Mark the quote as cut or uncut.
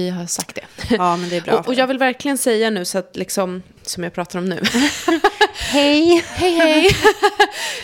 cut